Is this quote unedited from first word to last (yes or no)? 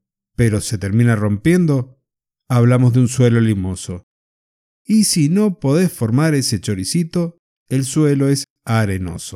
yes